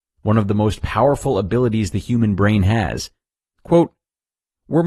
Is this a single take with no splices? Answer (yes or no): no